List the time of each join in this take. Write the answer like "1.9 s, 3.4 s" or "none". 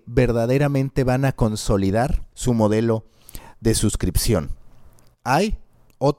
2.3 s